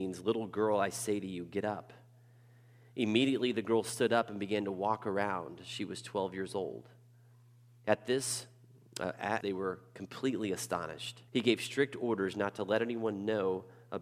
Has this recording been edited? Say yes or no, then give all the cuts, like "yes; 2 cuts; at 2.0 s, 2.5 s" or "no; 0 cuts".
yes; 2 cuts; at 9.4 s, 11.3 s